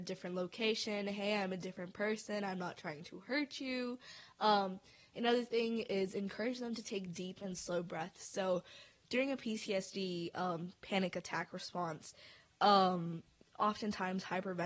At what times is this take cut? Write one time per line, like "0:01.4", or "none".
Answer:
none